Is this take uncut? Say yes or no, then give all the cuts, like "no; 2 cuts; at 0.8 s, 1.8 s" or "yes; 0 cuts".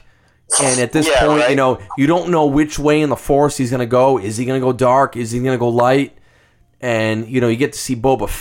yes; 0 cuts